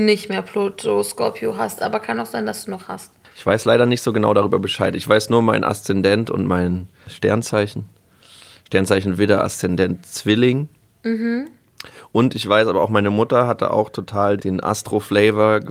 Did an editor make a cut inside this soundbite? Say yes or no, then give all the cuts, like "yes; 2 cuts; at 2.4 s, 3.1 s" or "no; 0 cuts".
no; 0 cuts